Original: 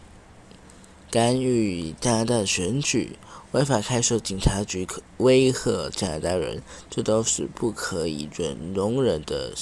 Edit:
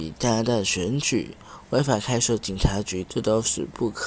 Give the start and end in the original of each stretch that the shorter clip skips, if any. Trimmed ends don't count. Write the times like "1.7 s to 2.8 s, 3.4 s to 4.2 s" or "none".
4.9 s to 6.9 s